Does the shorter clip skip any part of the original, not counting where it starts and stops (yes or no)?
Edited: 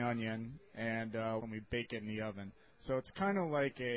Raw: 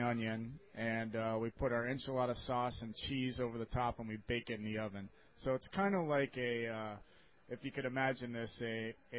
yes